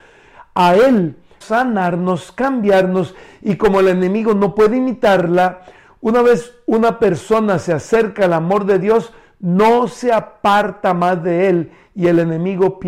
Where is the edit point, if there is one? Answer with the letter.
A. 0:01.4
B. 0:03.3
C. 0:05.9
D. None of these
A